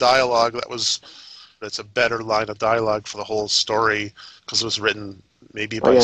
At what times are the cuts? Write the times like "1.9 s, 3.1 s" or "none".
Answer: 1.6 s, 4.4 s